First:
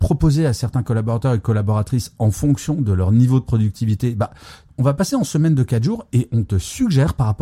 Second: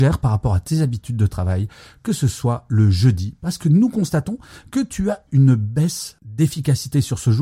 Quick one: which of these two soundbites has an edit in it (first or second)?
first